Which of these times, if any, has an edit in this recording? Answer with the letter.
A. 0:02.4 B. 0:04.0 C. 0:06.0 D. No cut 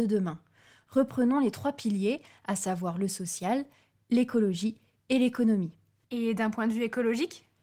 C